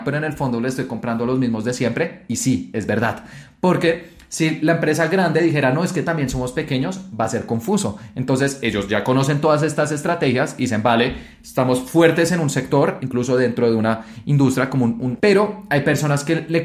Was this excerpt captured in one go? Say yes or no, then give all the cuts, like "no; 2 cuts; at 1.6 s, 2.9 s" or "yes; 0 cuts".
no; 2 cuts; at 13.0 s, 15.2 s